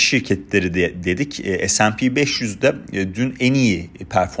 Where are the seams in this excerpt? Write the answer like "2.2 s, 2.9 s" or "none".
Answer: none